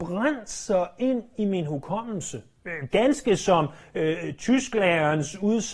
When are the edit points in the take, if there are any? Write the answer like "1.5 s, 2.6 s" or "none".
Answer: none

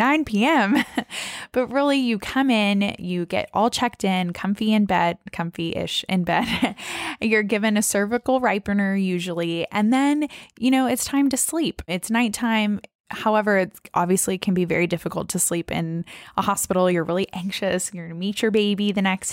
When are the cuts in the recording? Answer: none

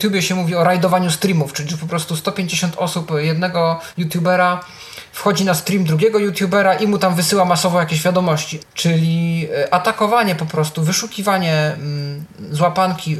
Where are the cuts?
8.6 s

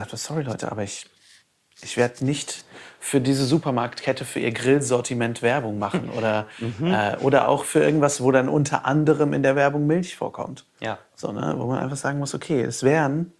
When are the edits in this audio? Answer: none

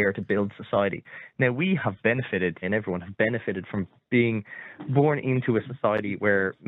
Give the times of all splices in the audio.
2.6 s

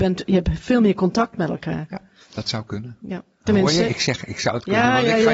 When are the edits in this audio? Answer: none

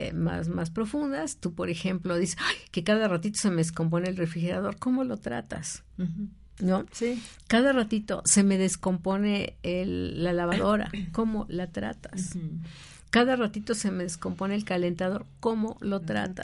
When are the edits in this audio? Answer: none

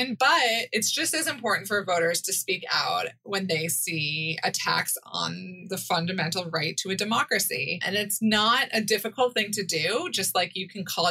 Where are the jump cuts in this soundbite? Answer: none

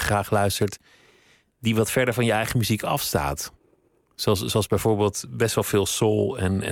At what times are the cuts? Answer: none

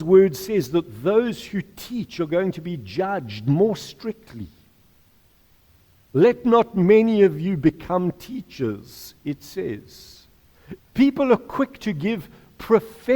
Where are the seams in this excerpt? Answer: 10.8 s

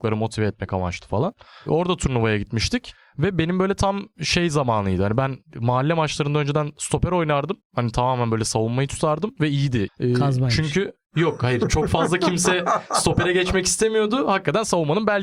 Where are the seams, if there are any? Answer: 9.9 s

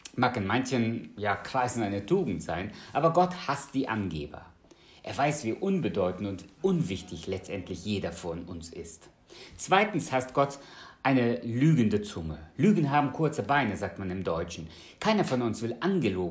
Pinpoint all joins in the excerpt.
none

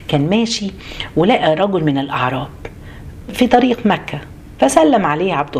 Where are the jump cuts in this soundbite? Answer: 3.3 s

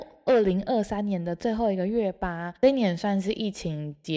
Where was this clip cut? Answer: none

